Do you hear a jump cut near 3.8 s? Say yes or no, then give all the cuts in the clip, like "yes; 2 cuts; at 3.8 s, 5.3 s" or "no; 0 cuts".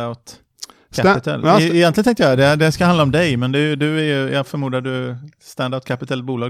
no; 0 cuts